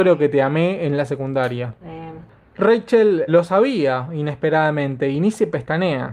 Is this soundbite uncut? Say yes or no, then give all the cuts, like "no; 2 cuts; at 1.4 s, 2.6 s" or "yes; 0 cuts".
no; 2 cuts; at 1.8 s, 3.3 s